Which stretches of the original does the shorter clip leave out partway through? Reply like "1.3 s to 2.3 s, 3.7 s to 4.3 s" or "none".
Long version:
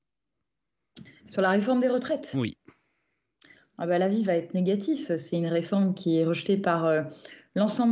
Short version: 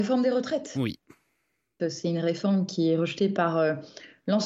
3.4 s to 5.1 s